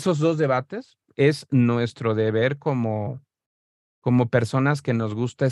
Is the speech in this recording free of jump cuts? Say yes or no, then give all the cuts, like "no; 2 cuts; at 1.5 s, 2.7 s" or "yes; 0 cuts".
yes; 0 cuts